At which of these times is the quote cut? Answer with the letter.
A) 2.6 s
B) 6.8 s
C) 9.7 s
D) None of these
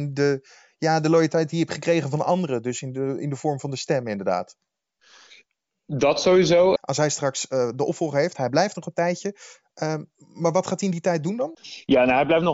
B